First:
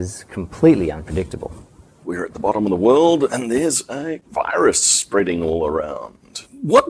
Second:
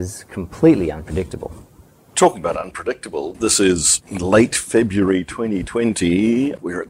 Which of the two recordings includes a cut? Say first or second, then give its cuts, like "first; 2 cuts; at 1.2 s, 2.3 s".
first; 1 cut; at 2.0 s